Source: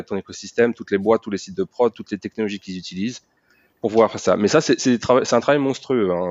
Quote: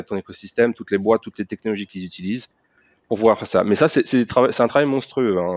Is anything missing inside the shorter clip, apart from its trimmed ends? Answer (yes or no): yes